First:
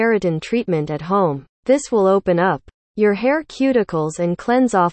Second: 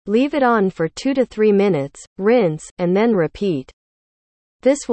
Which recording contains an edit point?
first; 1 cut; at 1.5 s

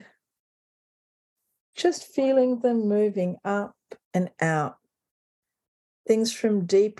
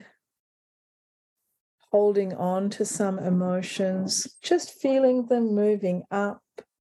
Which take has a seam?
first; 2 cuts; at 1.7 s, 4.0 s

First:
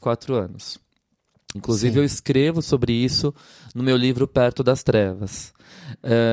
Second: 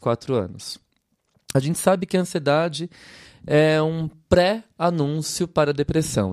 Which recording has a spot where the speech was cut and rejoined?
first; 1 cut; at 1.5 s

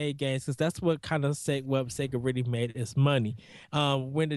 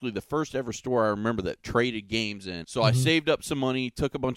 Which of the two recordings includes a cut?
second; 1 cut; at 2.6 s

